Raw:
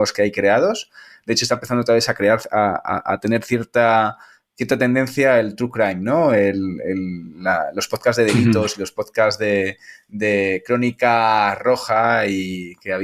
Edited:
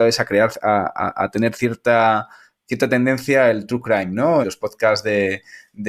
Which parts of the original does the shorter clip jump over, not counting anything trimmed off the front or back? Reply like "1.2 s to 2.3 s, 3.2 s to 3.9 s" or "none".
6.3 s to 8.8 s